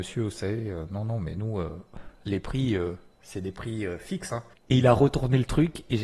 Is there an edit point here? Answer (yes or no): yes